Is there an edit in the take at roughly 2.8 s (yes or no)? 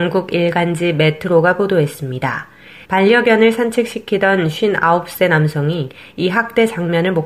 yes